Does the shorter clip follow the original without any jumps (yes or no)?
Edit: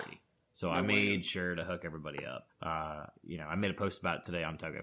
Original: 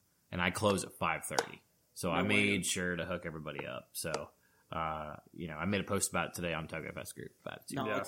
no